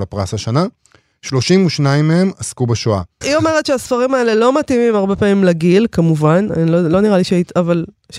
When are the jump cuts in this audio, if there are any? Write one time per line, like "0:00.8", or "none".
0:03.2